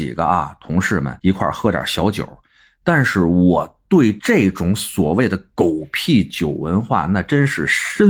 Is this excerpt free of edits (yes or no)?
yes